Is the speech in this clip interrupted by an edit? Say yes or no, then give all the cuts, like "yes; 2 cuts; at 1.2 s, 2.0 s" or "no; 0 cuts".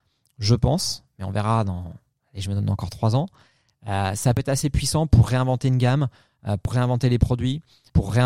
no; 0 cuts